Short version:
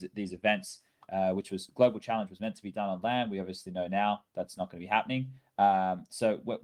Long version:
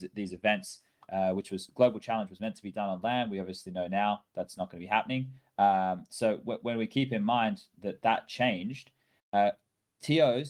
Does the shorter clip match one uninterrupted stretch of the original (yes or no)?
yes